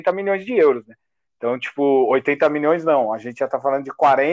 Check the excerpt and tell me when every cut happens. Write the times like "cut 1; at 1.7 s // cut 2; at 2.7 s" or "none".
none